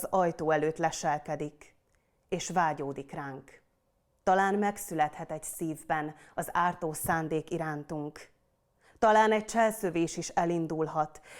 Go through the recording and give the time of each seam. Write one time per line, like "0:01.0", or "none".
0:04.2